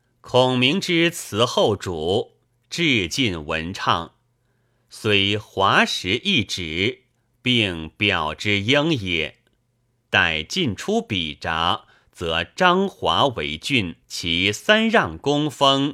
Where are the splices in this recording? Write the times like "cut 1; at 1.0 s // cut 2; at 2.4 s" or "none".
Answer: cut 1; at 10.0 s // cut 2; at 14.0 s